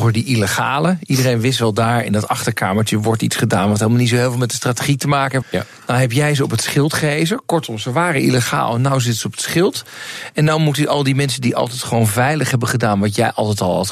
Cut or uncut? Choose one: cut